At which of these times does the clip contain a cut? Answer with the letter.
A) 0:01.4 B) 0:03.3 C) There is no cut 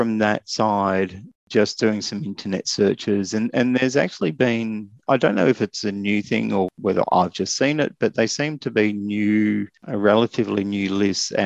C